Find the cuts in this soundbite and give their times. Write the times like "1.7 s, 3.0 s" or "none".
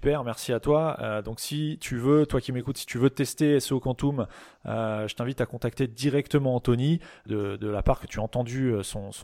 7.3 s

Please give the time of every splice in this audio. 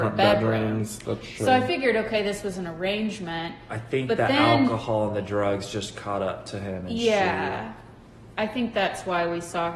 none

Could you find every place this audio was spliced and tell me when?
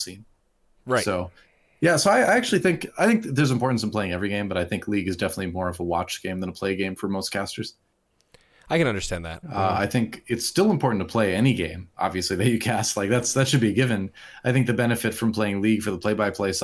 9.4 s

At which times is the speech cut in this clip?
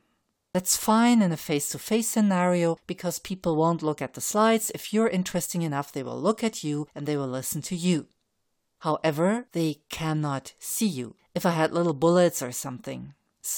9.5 s, 11.2 s

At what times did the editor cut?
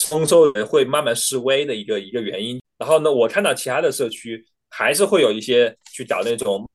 2.6 s

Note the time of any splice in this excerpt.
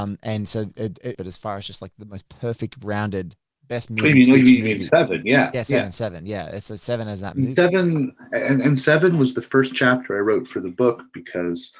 1.1 s

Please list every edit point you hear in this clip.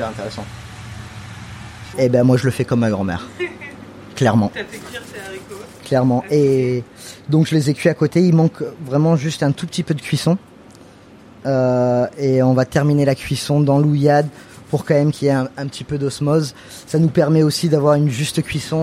1.9 s

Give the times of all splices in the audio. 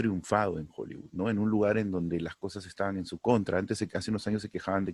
none

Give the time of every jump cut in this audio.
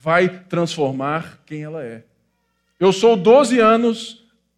none

